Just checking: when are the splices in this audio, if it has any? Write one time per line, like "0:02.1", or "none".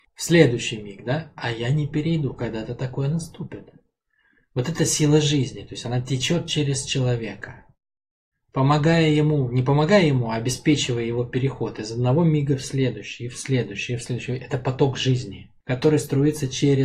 0:15.6